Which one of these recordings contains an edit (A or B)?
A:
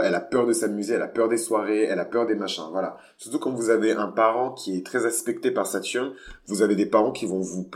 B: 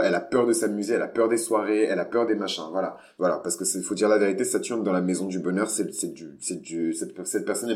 B